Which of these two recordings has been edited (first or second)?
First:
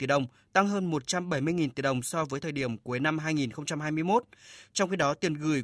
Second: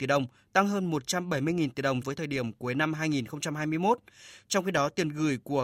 second